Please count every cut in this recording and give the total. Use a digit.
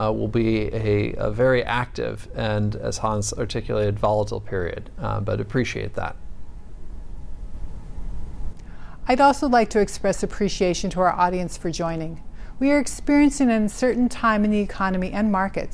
1